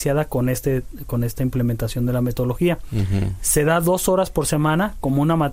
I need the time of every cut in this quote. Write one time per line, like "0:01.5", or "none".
none